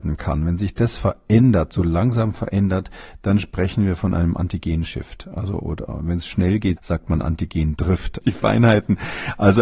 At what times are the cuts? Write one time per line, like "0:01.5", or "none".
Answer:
0:06.8
0:08.2